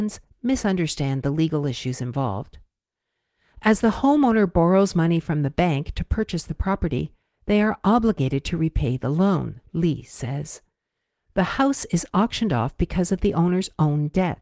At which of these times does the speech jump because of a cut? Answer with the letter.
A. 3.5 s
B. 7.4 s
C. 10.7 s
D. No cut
D